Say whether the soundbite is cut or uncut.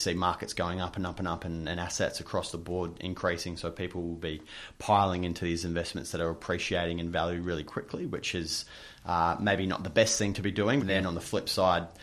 cut